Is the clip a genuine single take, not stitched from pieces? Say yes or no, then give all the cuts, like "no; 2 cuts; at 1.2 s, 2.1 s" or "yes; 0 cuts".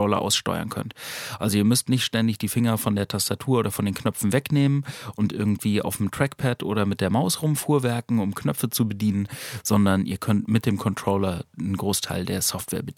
yes; 0 cuts